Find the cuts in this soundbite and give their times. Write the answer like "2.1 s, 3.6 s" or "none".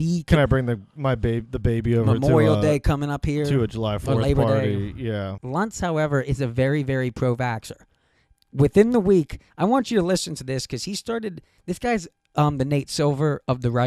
5.4 s